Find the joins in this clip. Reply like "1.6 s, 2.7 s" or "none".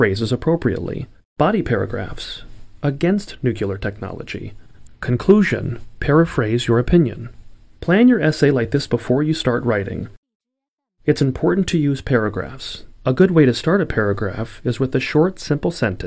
1.4 s, 12.9 s

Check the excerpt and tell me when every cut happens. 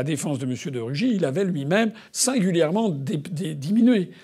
2.1 s

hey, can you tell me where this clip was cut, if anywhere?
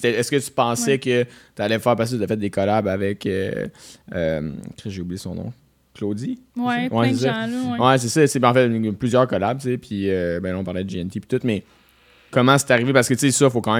none

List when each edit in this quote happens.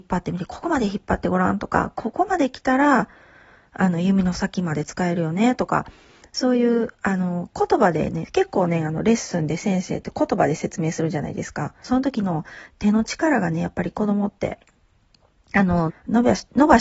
11.8 s, 15.9 s

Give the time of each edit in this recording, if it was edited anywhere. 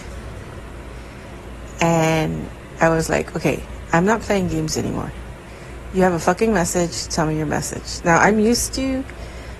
none

